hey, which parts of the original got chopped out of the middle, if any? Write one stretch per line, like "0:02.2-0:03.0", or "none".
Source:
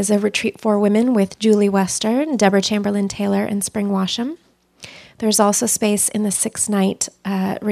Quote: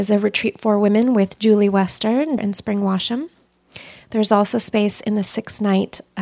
0:02.4-0:03.5